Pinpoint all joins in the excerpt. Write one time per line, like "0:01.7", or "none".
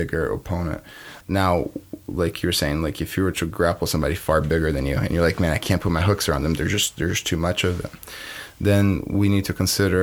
0:01.2